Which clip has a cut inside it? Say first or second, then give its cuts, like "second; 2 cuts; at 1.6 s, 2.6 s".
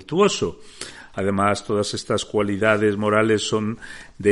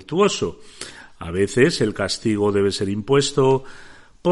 first; 1 cut; at 1.1 s